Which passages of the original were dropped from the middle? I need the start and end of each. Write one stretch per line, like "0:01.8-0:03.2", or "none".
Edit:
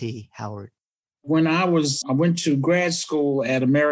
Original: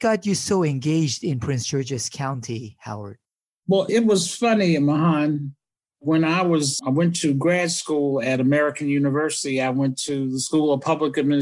0:03.5-0:05.8